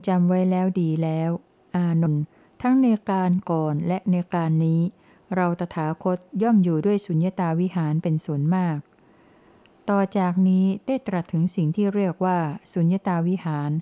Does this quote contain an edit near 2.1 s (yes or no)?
yes